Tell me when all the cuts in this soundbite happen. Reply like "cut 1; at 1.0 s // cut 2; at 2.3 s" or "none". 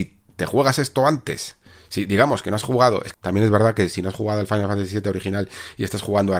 cut 1; at 3.1 s